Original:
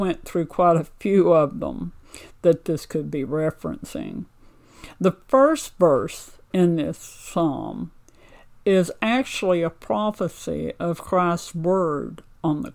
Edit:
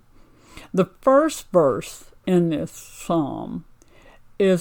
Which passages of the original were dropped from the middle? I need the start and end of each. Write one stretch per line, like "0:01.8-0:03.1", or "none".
none